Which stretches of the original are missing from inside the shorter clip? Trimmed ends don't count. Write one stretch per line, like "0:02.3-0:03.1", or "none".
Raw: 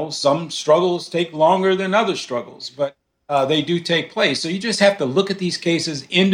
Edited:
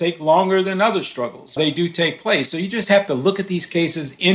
0:02.7-0:03.5